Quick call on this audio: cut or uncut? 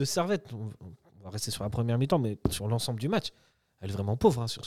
uncut